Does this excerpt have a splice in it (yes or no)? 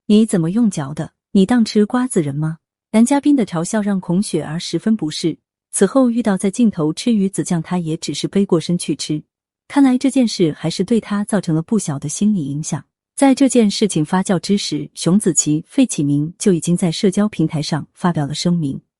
no